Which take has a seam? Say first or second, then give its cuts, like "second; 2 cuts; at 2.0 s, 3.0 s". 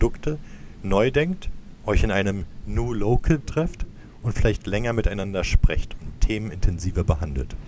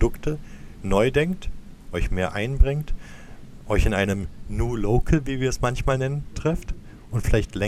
first; 2 cuts; at 1.8 s, 3.4 s